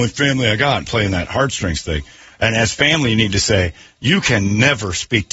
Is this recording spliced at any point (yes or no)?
no